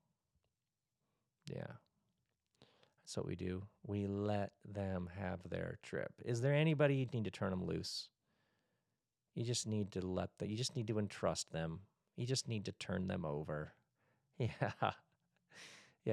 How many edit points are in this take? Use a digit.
1